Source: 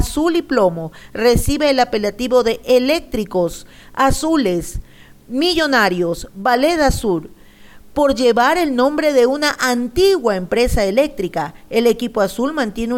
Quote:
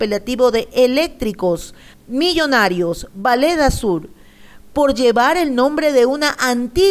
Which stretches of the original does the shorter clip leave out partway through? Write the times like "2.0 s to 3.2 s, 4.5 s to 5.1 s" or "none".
3.9 s to 5.1 s